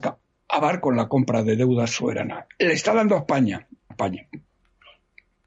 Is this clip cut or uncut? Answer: cut